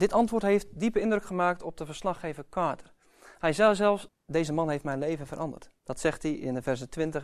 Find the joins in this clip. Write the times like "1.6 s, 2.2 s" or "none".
4.1 s, 5.8 s